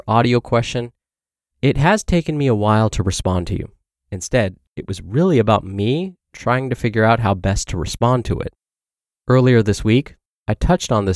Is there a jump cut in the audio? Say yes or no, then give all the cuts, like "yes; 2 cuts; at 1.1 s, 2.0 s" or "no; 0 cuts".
yes; 1 cut; at 3.9 s